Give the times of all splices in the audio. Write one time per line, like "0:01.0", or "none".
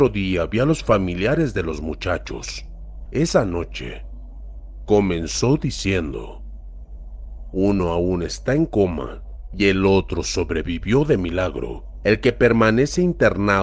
0:03.1